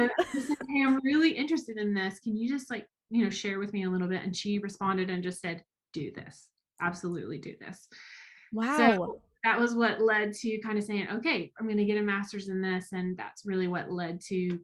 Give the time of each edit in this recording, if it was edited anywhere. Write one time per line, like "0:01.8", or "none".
none

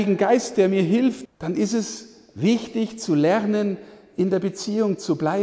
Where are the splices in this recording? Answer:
0:01.3

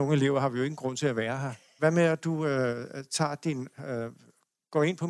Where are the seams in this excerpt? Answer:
0:01.8

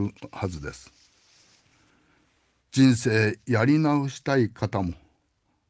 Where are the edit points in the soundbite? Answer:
none

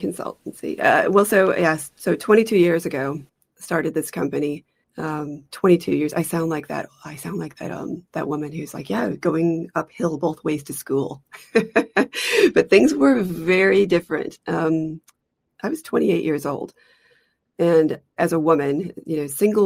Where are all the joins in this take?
0:04.8
0:18.2

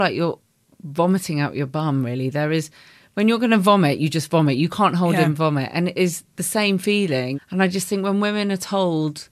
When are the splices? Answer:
0:07.3

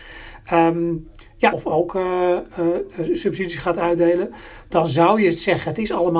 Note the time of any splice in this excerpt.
0:01.5

